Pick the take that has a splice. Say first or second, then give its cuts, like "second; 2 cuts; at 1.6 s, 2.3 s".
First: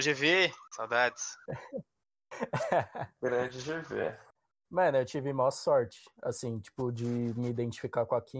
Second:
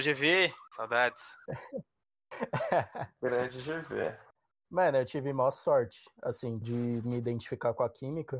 second; 1 cut; at 6.6 s